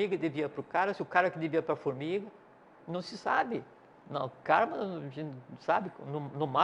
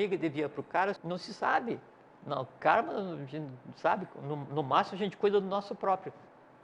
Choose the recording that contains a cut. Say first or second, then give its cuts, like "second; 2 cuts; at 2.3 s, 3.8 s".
second; 1 cut; at 1.0 s